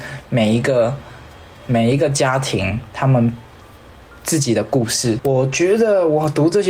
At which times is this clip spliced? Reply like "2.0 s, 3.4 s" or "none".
5.2 s